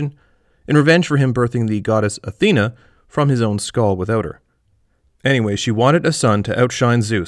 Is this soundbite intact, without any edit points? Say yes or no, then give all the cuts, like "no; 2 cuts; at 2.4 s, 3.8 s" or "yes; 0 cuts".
no; 1 cut; at 5.1 s